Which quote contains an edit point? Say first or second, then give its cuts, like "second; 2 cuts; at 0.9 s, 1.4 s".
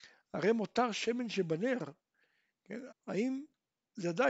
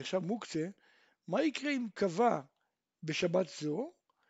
first; 1 cut; at 2.9 s